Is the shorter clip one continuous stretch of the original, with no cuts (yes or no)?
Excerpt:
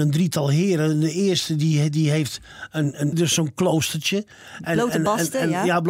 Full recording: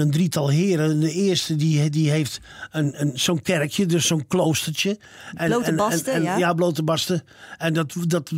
no